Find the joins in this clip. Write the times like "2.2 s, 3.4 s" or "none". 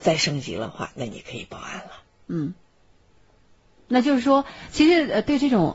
none